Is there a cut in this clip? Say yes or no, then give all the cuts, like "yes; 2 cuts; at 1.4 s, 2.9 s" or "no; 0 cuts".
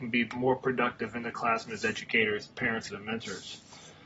yes; 1 cut; at 2.9 s